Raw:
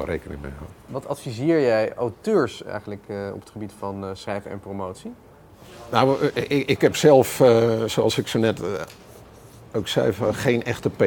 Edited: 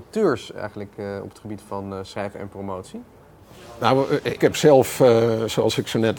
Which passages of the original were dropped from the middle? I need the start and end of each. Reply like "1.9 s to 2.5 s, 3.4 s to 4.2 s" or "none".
6.5 s to 6.8 s